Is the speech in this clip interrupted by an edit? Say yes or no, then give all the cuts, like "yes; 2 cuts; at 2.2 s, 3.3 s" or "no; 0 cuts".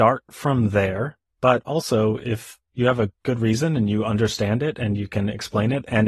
no; 0 cuts